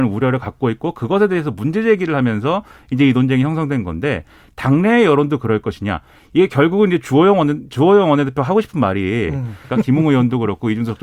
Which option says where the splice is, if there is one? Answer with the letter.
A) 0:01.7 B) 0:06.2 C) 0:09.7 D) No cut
C